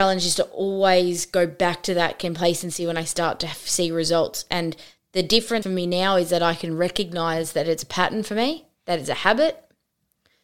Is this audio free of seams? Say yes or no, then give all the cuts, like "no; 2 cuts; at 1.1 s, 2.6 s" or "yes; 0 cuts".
no; 1 cut; at 5.6 s